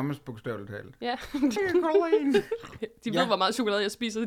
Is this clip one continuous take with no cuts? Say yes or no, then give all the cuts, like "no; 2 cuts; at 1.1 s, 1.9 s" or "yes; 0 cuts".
no; 2 cuts; at 1.6 s, 2.8 s